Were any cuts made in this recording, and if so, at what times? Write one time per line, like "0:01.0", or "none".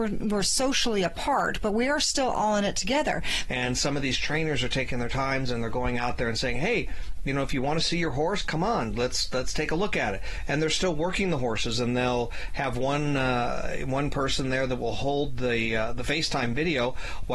0:03.5

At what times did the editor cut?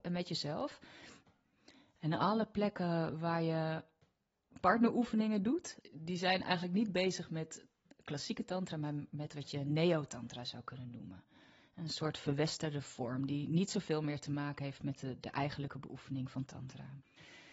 0:05.8

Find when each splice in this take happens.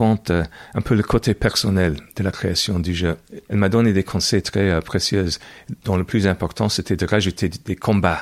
0:03.5

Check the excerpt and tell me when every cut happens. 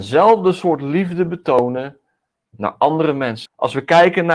0:03.5

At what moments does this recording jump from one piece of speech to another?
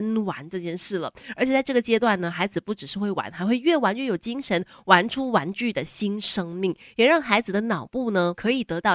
none

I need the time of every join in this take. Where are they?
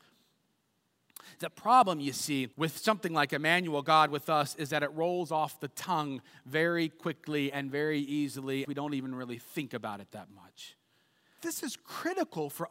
0:02.5
0:08.6
0:11.4

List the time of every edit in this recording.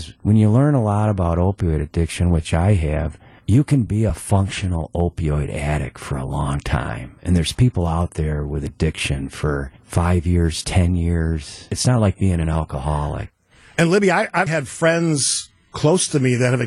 0:14.5

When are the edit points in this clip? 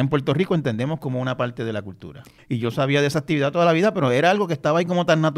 0:02.4

